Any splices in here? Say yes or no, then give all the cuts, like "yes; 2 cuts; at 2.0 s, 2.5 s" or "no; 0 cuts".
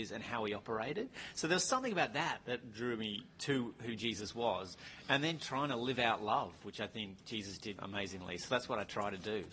yes; 2 cuts; at 5.4 s, 7.8 s